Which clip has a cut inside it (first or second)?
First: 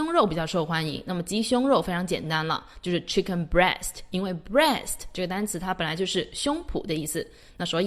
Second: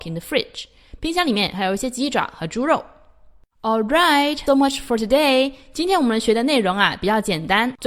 second